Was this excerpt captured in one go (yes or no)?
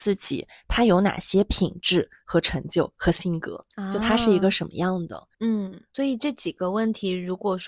no